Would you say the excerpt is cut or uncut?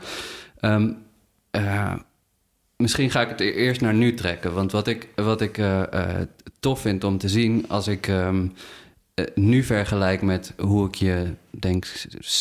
uncut